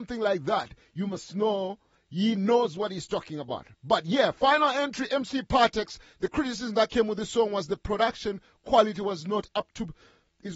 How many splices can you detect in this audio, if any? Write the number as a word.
zero